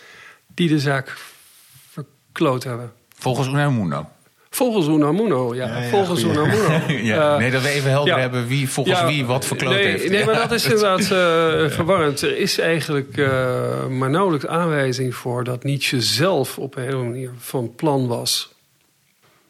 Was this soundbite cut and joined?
no; 0 cuts

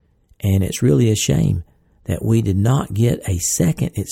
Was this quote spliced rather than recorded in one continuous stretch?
no; 0 cuts

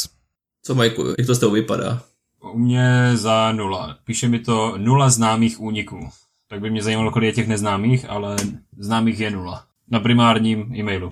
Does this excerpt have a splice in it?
no; 0 cuts

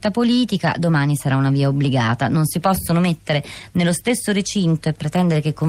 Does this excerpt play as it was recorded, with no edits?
yes; 0 cuts

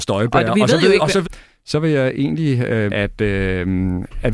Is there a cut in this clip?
yes; 2 cuts; at 1.2 s, 2.9 s

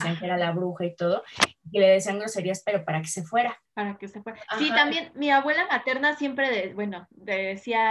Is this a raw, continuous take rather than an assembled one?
no; 1 cut; at 3.7 s

